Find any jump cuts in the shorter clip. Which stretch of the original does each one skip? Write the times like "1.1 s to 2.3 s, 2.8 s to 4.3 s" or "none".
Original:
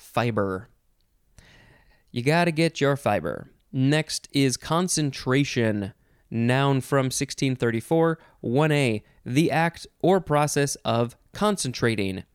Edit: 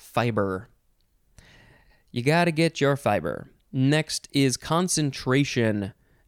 none